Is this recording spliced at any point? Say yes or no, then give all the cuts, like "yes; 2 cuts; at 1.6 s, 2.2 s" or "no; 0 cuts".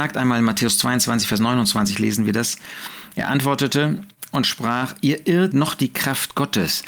yes; 1 cut; at 5.5 s